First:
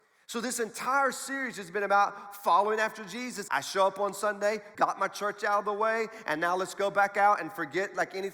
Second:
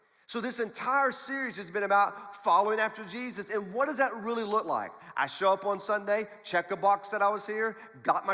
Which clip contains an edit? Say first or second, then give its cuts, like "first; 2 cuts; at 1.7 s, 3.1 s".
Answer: first; 2 cuts; at 3.5 s, 4.7 s